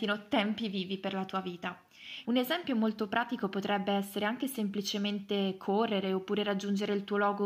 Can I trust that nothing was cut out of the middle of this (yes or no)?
no